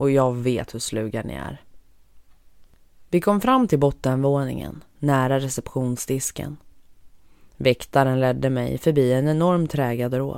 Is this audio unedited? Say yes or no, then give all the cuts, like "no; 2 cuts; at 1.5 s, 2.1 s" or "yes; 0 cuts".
yes; 0 cuts